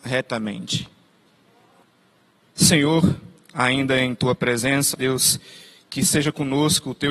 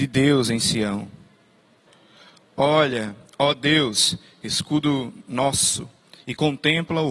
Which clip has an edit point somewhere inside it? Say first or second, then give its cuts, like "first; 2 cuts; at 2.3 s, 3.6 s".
first; 1 cut; at 4.9 s